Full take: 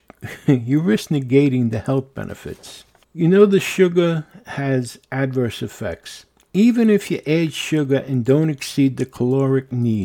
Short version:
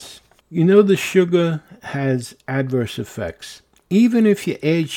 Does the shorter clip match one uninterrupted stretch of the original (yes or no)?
yes